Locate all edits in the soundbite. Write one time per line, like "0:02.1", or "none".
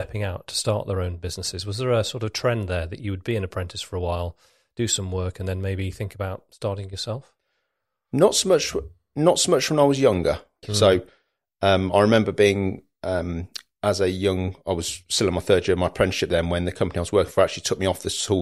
0:10.6